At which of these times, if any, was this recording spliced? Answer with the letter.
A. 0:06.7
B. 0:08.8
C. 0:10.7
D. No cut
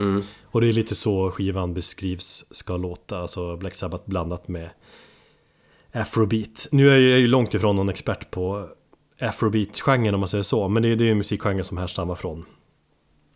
D